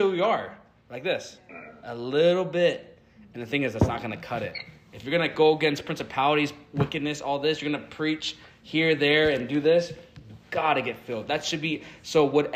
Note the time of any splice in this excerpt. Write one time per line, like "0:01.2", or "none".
none